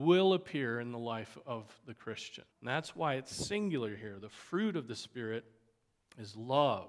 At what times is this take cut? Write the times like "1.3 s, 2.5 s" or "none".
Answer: 2.5 s